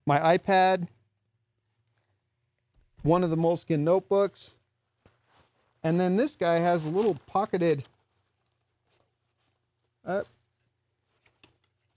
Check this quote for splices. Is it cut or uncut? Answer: uncut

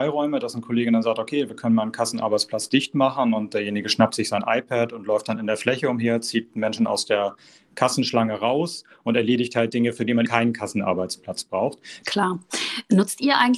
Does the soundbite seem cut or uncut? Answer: cut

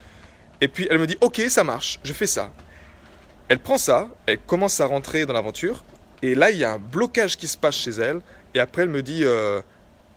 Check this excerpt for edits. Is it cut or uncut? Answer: uncut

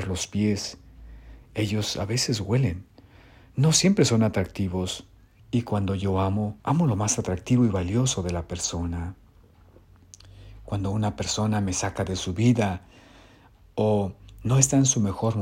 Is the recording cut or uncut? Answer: cut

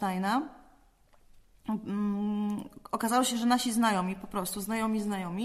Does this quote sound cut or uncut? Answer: uncut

